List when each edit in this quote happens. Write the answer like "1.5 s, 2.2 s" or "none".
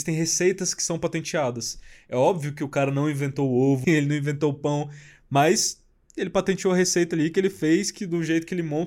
3.8 s